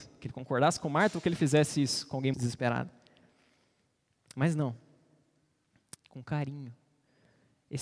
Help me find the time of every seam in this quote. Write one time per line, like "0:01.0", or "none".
0:02.3
0:06.0